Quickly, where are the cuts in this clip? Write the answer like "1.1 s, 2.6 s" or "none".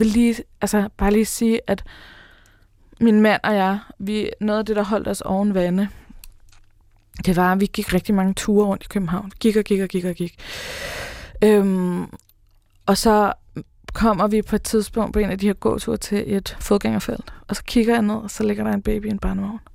none